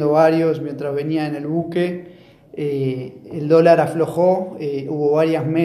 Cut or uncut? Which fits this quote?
uncut